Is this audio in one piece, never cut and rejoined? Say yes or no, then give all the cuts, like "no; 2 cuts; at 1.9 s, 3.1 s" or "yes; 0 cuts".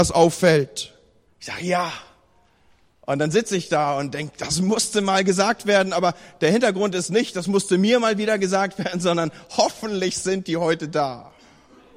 no; 1 cut; at 1.3 s